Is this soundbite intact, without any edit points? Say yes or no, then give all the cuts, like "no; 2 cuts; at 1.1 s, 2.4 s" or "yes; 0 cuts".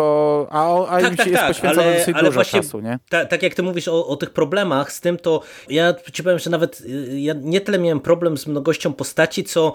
no; 1 cut; at 5.7 s